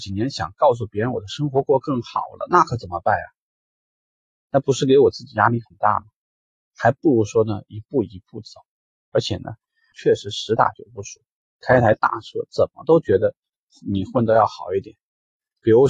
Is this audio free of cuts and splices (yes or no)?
no